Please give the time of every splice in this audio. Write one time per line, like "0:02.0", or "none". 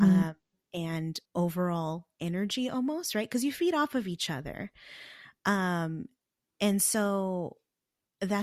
0:01.3